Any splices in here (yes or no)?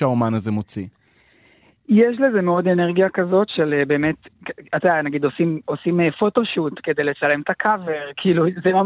no